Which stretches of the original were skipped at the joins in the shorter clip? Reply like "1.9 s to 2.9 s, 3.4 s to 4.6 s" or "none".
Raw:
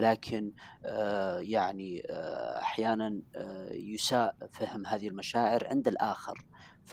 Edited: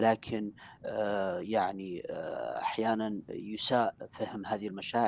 3.3 s to 3.7 s